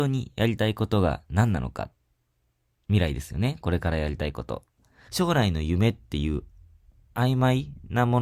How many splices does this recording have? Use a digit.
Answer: 1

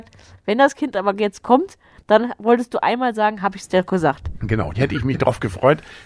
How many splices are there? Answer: 1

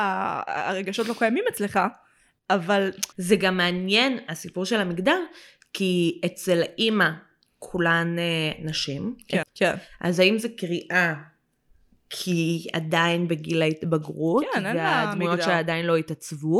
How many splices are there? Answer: 2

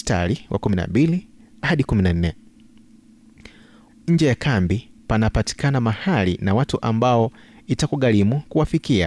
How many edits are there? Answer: 1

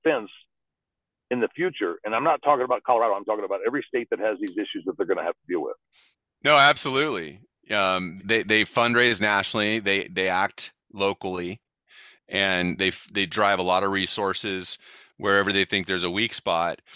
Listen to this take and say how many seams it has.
1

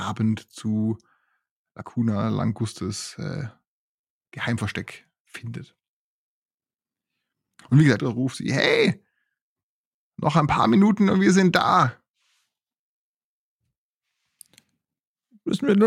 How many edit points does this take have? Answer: 1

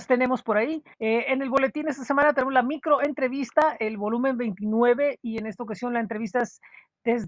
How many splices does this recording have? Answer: 1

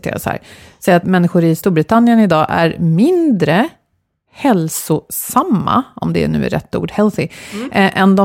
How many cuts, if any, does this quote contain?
1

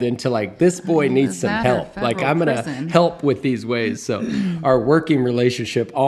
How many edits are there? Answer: 0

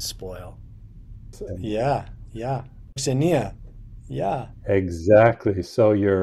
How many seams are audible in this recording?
2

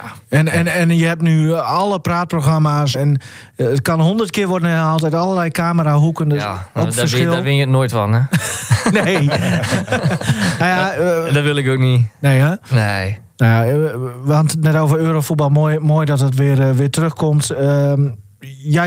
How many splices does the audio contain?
1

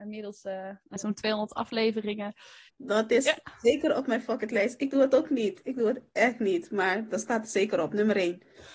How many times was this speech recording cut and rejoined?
2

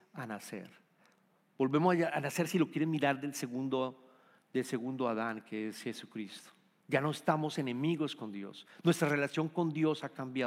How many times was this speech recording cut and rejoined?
1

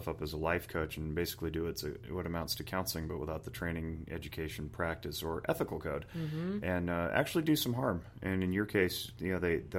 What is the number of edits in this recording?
0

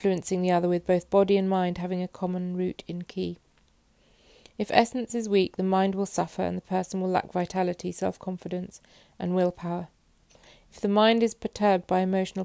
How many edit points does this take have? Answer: 0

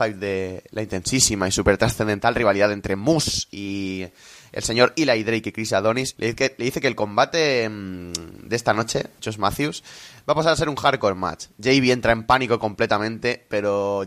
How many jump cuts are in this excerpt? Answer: 2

